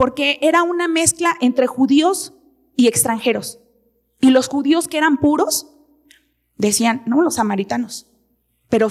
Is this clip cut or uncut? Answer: uncut